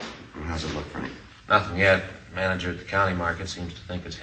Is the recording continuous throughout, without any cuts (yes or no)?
yes